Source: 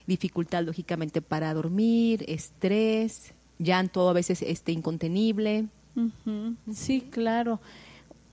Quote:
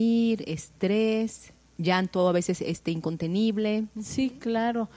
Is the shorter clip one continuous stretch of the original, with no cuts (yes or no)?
no